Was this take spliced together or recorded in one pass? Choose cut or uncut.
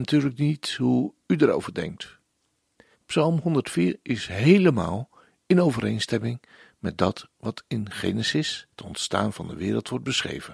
cut